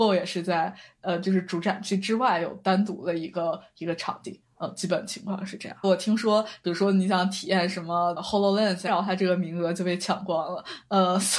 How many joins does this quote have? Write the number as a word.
two